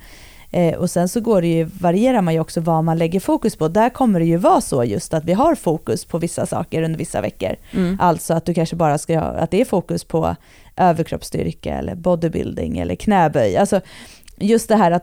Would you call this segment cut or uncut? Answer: uncut